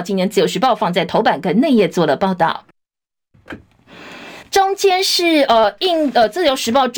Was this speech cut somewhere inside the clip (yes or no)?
no